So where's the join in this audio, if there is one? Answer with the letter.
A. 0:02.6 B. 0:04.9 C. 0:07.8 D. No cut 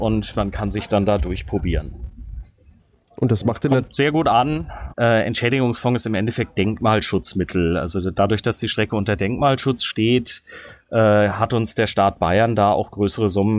B